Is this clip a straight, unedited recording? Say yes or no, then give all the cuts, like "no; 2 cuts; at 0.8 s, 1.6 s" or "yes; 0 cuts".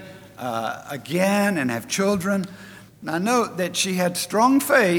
no; 1 cut; at 2.9 s